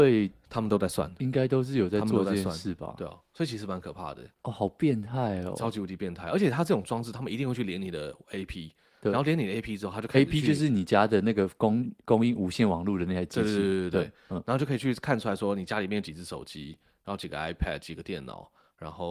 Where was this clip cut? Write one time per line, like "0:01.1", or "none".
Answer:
0:04.3